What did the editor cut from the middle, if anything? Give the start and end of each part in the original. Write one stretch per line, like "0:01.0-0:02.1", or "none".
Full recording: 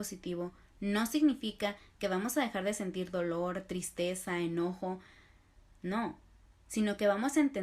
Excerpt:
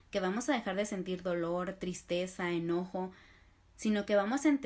0:05.5-0:06.5